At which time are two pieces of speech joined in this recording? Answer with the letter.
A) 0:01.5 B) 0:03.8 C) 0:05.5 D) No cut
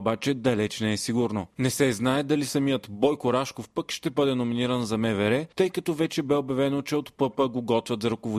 A